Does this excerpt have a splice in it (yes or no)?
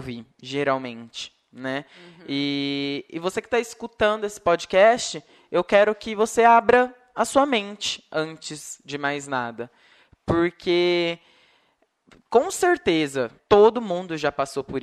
yes